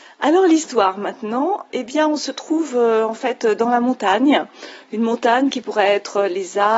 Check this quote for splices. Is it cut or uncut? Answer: cut